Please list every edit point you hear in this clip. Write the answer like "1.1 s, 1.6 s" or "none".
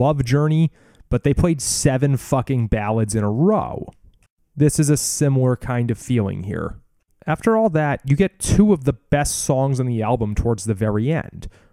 none